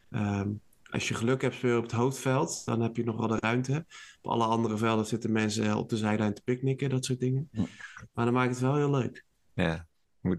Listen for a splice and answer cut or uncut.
uncut